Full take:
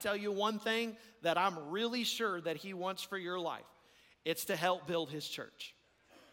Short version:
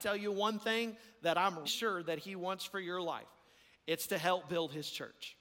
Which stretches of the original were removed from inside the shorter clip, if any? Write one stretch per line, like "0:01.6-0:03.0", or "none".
0:01.6-0:02.0